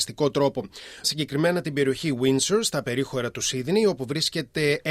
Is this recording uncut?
no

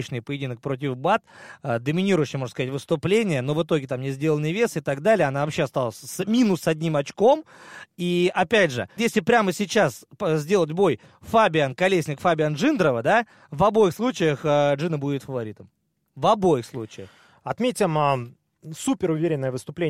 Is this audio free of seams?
no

